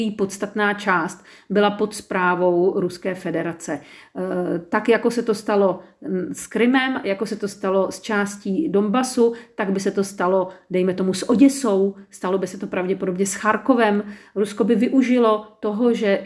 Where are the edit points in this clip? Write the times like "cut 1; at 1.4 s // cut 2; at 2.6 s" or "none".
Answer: none